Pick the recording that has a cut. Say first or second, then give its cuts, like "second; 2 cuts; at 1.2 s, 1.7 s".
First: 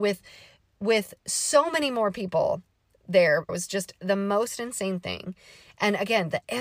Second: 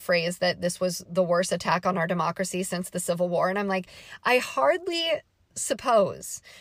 first; 1 cut; at 3.5 s